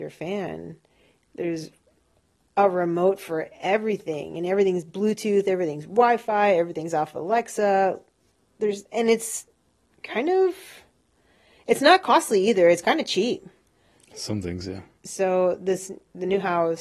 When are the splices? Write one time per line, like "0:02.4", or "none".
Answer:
0:15.0